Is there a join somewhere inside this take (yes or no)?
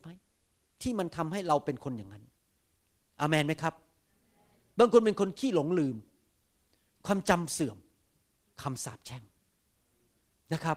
no